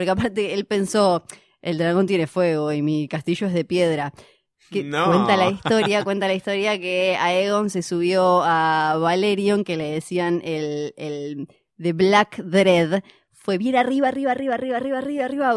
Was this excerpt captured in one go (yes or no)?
yes